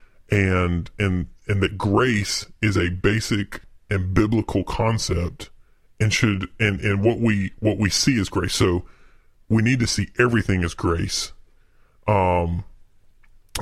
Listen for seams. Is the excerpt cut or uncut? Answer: uncut